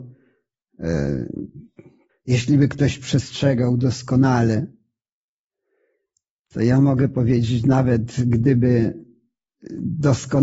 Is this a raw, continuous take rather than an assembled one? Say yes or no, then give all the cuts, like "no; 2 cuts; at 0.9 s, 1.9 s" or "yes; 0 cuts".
no; 1 cut; at 2.1 s